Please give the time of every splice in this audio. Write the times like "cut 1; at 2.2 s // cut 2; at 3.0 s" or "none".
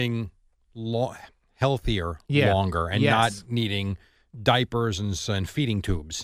none